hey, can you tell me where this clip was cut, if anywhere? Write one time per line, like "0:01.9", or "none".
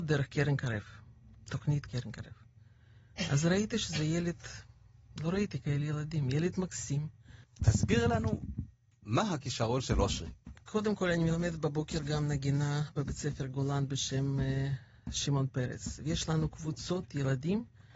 0:07.4
0:10.6